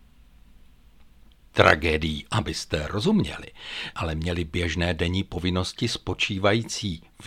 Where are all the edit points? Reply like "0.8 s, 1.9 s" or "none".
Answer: 2.3 s, 3.9 s